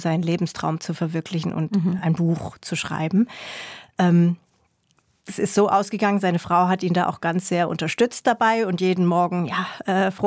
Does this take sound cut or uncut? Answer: uncut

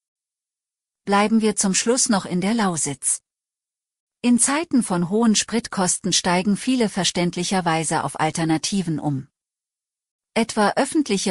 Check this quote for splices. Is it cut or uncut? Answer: uncut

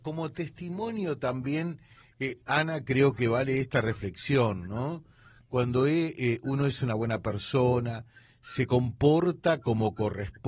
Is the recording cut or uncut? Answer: uncut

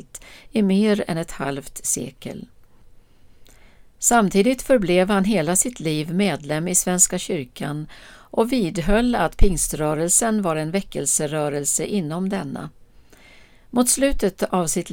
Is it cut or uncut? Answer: uncut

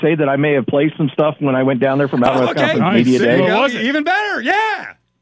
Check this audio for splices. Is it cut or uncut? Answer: uncut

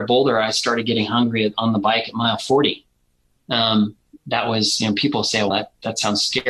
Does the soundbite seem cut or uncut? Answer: cut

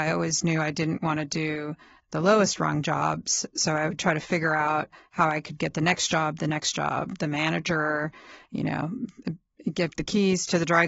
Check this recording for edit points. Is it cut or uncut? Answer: uncut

